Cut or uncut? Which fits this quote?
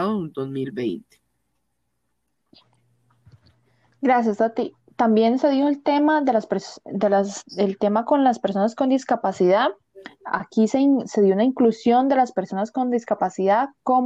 uncut